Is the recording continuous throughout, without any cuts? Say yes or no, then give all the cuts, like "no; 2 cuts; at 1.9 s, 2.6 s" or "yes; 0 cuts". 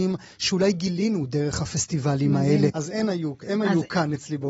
no; 1 cut; at 2.7 s